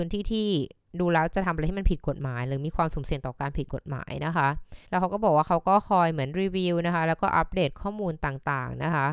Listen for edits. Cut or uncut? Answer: cut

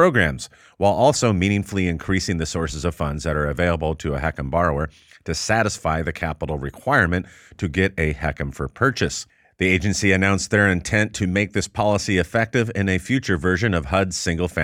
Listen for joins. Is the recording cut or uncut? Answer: uncut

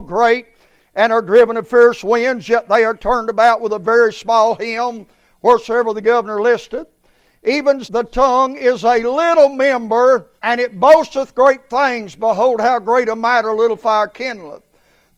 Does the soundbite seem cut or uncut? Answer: cut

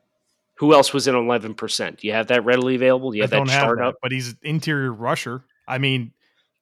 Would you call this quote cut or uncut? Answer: uncut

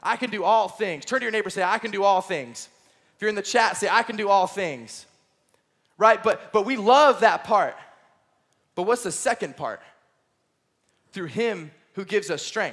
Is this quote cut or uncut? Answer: uncut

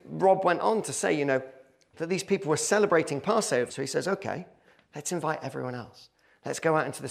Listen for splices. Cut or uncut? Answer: cut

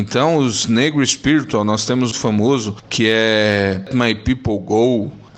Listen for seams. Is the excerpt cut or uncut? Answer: cut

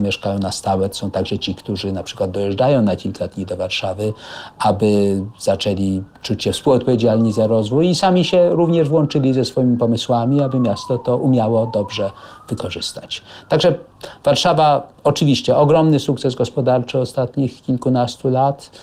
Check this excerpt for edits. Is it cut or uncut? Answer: uncut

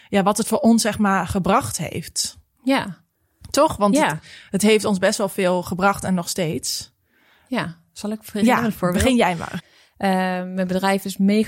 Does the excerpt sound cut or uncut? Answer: cut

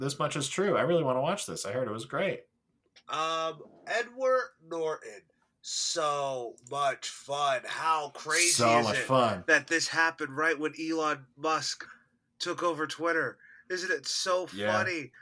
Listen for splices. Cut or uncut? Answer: uncut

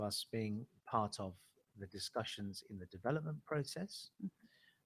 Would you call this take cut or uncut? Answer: uncut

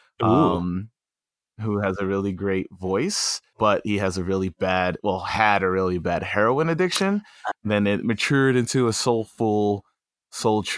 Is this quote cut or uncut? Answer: cut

